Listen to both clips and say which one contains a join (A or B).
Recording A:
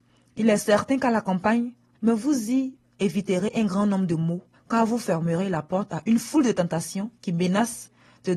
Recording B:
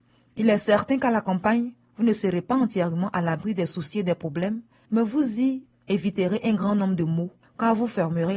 A